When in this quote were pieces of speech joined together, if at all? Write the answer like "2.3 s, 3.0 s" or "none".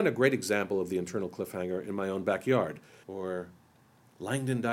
3.0 s